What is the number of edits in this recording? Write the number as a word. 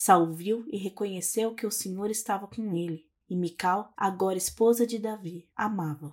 one